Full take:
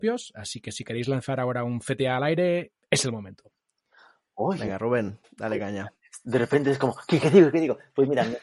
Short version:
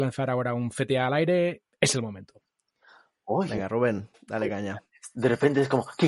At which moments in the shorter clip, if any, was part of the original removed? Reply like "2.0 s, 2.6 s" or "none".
none